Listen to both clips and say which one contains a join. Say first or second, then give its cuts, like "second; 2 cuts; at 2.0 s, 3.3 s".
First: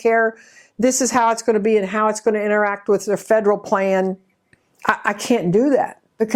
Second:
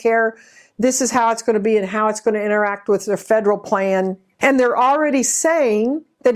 second; 1 cut; at 4.4 s